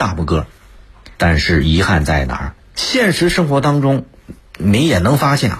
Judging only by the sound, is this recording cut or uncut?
cut